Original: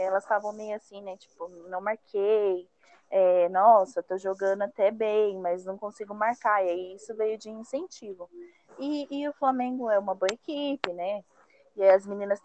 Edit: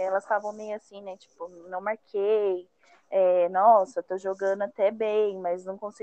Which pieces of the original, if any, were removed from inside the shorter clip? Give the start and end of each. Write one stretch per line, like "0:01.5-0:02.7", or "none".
none